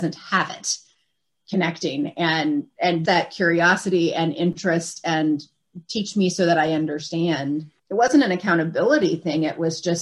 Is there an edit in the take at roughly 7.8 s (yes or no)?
yes